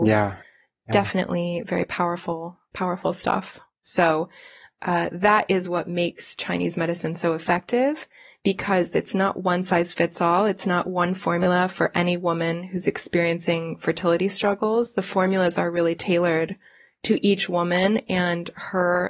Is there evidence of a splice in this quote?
yes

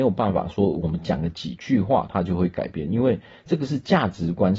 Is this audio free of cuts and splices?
yes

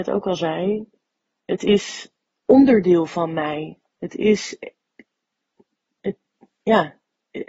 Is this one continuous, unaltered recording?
yes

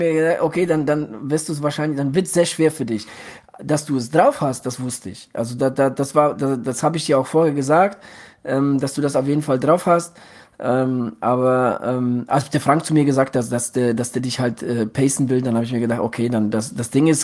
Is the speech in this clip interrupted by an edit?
no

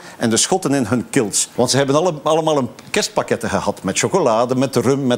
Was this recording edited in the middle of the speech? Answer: yes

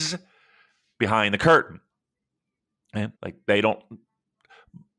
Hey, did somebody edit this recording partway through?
yes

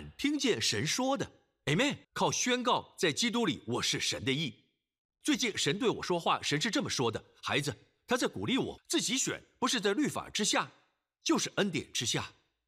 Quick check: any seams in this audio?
yes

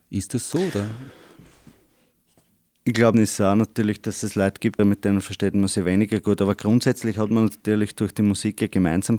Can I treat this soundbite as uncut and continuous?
no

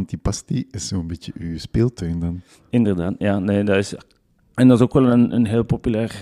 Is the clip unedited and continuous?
yes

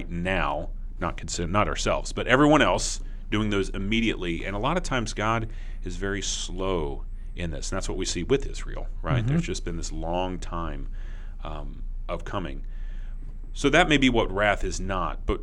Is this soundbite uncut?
yes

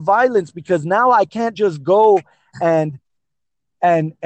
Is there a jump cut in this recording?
no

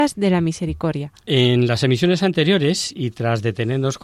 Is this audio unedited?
yes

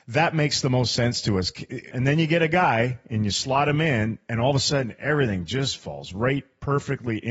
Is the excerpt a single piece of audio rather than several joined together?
no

